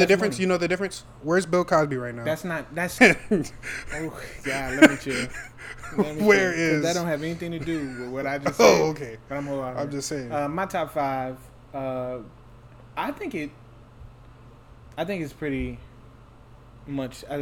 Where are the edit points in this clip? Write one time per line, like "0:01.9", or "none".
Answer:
0:03.0